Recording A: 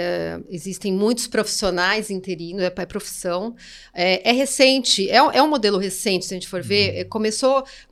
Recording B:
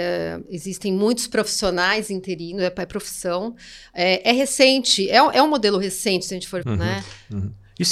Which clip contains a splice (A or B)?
B